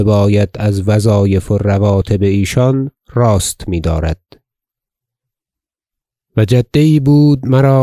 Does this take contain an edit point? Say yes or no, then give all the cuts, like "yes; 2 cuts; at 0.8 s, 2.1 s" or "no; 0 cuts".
no; 0 cuts